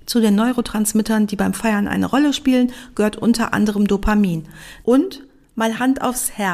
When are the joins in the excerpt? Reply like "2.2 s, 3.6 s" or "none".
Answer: 4.8 s